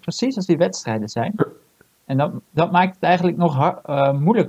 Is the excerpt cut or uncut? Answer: uncut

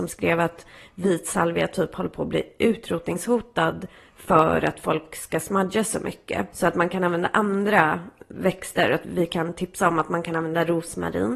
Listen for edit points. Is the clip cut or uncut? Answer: cut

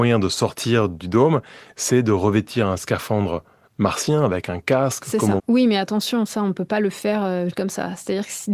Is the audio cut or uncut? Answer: cut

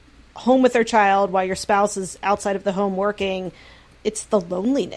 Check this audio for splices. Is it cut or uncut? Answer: uncut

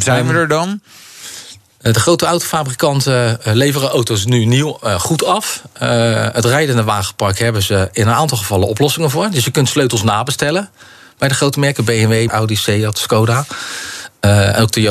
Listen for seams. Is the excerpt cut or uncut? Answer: cut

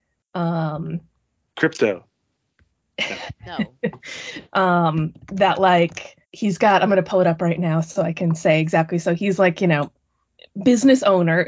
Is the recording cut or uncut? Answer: cut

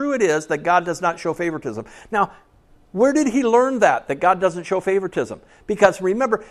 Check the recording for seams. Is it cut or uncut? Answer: uncut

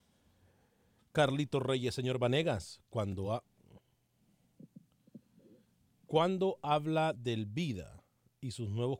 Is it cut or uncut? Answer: uncut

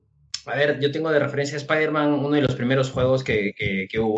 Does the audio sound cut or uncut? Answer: uncut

